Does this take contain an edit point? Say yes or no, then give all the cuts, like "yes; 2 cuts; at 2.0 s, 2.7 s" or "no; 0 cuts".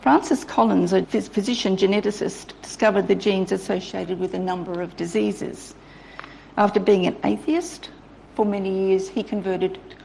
yes; 1 cut; at 1.0 s